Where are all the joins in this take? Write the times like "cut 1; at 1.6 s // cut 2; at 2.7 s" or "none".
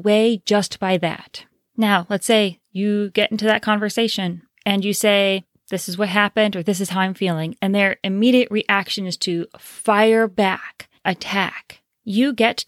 none